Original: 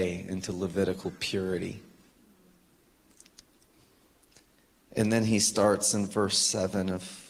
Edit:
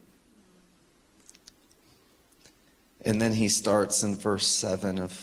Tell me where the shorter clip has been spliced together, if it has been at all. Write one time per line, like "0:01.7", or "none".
none